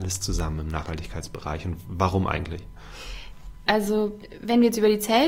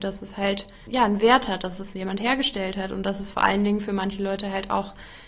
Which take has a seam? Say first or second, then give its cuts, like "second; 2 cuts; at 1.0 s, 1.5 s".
first; 1 cut; at 3.7 s